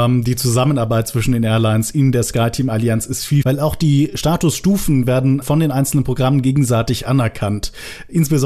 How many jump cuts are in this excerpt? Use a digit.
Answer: 2